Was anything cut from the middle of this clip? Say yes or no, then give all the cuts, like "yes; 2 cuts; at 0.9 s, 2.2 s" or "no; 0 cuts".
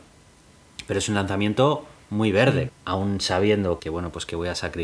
yes; 2 cuts; at 2.7 s, 3.8 s